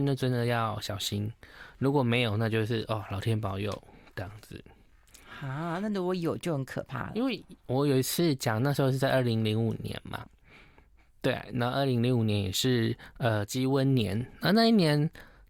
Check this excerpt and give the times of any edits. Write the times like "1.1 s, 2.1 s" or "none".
none